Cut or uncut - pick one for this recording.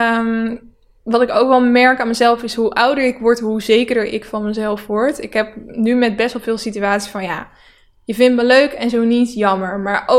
uncut